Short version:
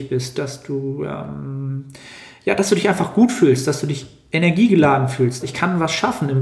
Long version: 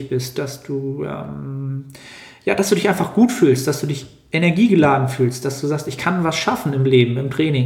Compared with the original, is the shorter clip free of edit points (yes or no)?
no